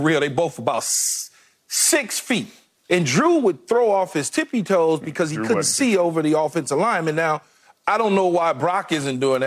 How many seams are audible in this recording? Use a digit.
0